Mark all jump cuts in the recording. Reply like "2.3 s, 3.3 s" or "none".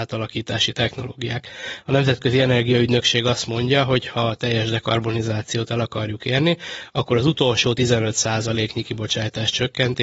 none